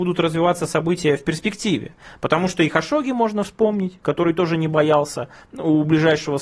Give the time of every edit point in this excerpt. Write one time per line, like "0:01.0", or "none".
none